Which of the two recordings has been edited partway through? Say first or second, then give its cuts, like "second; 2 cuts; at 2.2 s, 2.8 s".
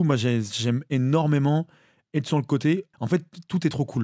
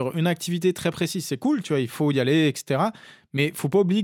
first; 1 cut; at 2.9 s